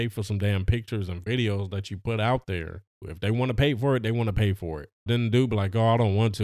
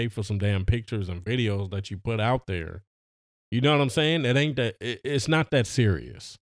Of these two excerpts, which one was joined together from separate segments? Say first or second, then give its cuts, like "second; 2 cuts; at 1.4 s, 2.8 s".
first; 2 cuts; at 3.0 s, 5.1 s